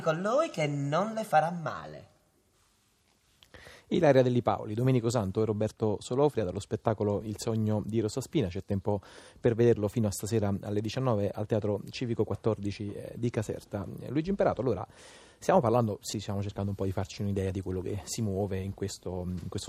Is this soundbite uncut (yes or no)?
no